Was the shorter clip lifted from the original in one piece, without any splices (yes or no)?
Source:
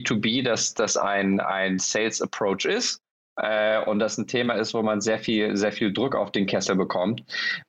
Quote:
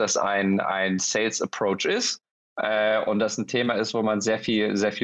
yes